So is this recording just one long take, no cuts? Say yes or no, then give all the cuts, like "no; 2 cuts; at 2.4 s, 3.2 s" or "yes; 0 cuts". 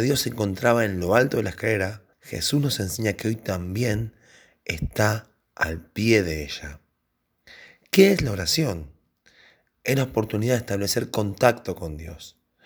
no; 1 cut; at 2.1 s